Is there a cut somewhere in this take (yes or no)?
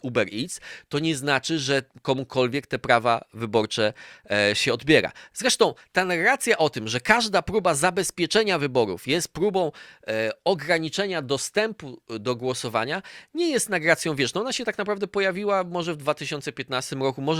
no